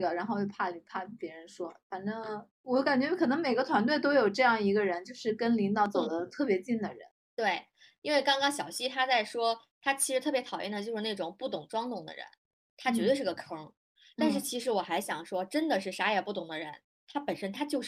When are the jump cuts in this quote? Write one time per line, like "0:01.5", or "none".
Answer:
none